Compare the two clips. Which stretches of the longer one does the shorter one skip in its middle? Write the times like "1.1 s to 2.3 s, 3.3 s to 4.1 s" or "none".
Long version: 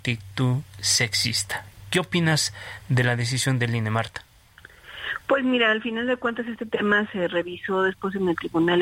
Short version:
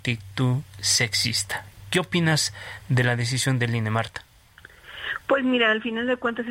none